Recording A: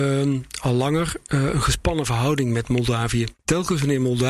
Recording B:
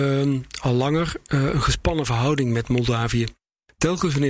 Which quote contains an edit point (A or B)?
A